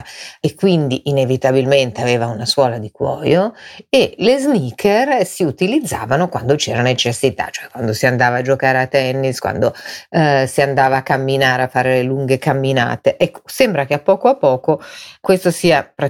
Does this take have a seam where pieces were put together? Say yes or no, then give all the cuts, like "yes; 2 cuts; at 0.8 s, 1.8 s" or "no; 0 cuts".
no; 0 cuts